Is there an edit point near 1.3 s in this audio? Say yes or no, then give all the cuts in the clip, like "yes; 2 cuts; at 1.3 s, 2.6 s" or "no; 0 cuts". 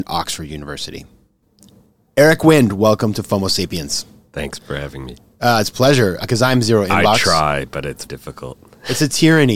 no; 3 cuts; at 4.6 s, 6.2 s, 8.1 s